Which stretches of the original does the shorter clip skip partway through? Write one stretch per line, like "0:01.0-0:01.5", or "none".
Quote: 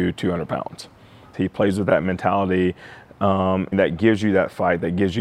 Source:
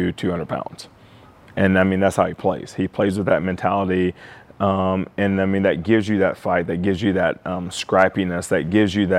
0:01.3-0:02.7
0:05.1-0:05.6